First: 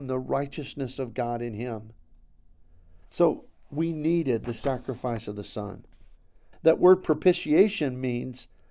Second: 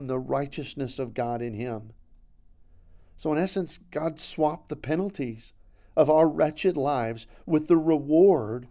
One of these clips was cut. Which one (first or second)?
first